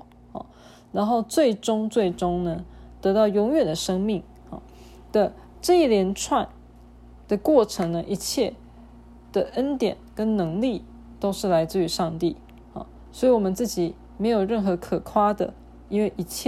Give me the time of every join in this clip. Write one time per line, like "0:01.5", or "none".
none